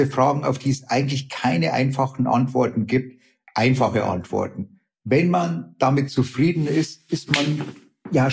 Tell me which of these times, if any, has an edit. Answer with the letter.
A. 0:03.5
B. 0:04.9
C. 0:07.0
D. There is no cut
D